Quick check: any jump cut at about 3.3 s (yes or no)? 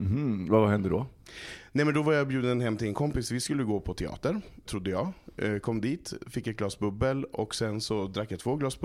no